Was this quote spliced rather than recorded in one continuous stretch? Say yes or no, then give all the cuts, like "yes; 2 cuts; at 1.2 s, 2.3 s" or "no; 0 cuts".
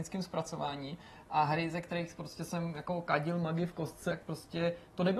yes; 1 cut; at 4.1 s